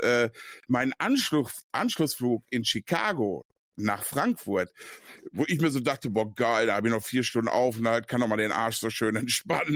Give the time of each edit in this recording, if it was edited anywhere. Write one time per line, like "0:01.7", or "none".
none